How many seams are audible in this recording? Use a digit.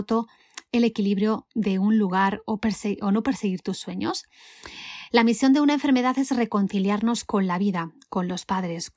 1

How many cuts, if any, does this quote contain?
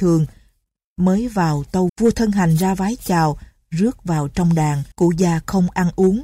2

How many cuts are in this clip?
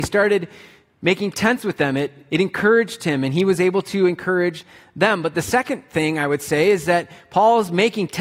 0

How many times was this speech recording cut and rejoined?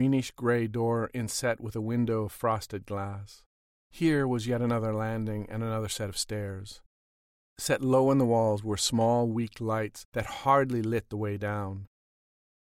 1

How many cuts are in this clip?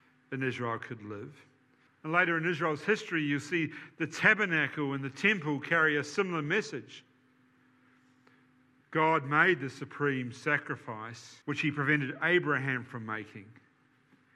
3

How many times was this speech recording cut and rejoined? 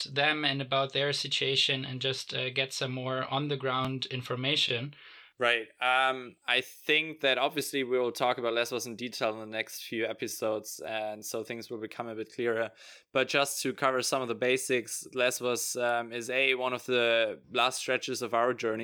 1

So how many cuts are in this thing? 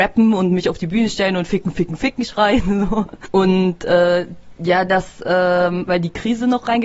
2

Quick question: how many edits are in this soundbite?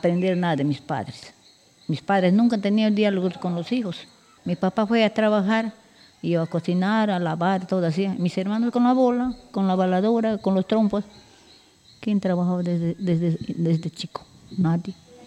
1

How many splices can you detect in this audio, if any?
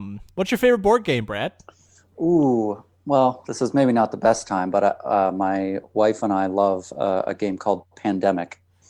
0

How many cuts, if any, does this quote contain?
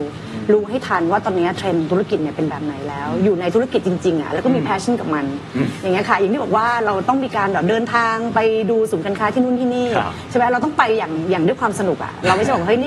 0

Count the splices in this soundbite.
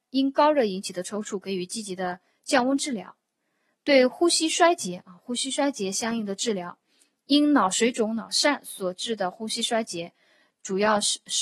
0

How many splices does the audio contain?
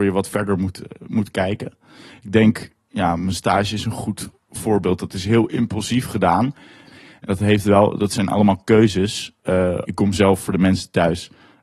2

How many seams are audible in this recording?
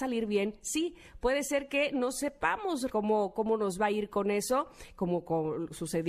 1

